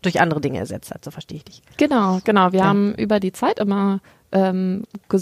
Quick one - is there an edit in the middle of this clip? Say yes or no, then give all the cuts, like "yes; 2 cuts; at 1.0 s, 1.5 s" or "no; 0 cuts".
no; 0 cuts